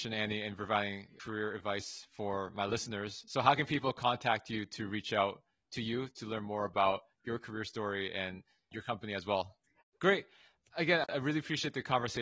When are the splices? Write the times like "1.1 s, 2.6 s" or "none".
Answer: 9.8 s